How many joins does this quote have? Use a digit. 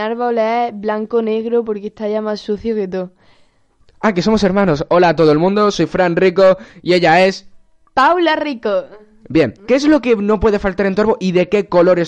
2